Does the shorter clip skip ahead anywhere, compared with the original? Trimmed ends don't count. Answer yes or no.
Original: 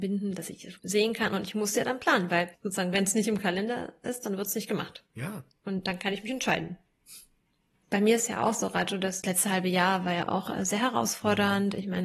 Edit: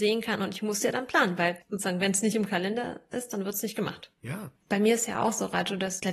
yes